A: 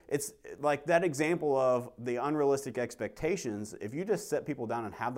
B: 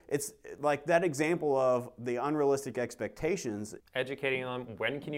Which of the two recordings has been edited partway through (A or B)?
B